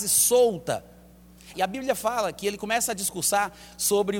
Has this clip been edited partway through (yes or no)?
yes